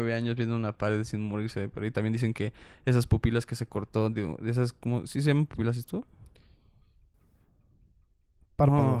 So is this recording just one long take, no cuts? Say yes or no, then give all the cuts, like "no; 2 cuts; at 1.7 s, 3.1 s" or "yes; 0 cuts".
yes; 0 cuts